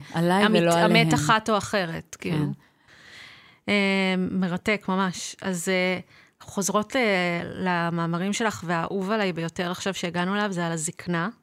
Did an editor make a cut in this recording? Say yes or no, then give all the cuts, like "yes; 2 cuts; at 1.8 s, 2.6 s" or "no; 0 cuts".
no; 0 cuts